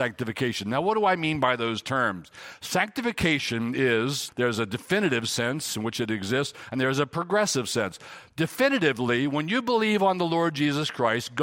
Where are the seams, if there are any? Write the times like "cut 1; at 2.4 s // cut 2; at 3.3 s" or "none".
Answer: cut 1; at 4.3 s